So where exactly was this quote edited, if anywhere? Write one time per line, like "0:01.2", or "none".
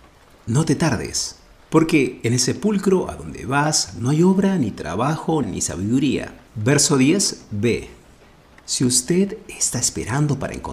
0:05.4